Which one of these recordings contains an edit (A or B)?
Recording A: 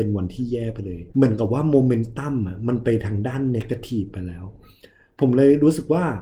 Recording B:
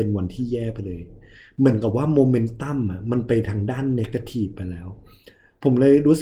A